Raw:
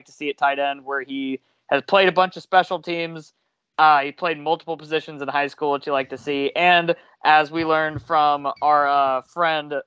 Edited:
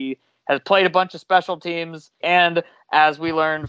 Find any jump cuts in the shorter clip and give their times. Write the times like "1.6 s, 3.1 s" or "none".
2.2 s